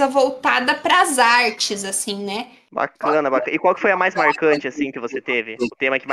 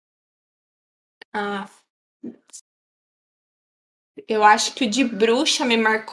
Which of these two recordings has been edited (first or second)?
first